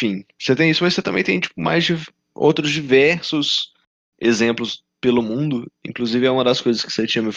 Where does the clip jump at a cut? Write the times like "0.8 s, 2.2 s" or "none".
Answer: none